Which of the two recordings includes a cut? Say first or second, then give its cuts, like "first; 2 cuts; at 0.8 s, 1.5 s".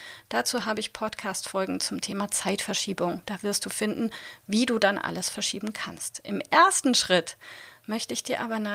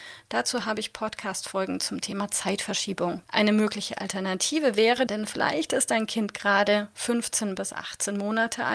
second; 2 cuts; at 3.2 s, 5.1 s